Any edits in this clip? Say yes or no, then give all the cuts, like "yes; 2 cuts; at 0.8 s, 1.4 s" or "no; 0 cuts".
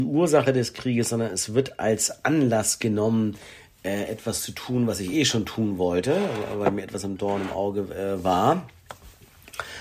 no; 0 cuts